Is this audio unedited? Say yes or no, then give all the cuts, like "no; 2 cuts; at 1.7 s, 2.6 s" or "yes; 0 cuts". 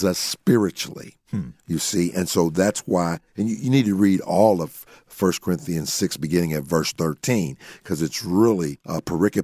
yes; 0 cuts